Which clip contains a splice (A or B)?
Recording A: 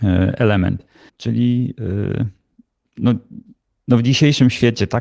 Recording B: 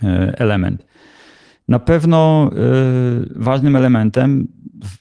A